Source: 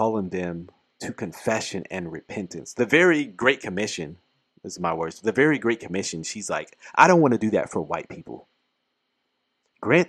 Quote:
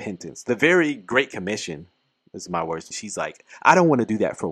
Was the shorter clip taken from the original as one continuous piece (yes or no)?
no